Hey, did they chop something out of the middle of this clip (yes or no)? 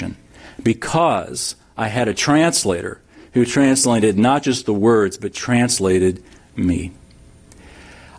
no